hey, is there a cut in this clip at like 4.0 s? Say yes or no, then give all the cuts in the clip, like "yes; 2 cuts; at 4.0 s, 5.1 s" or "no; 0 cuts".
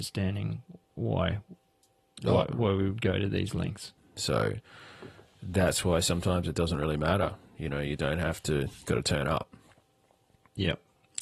yes; 2 cuts; at 4.0 s, 8.9 s